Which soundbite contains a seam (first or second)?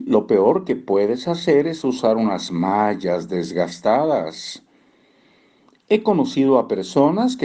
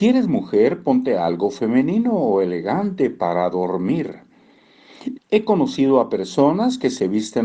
second